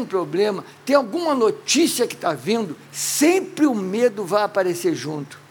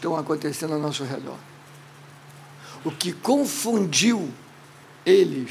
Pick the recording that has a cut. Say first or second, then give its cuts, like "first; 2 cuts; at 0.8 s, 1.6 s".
second; 1 cut; at 2.8 s